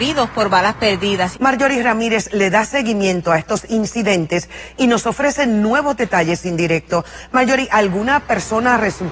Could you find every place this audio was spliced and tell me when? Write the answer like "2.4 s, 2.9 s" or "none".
1.3 s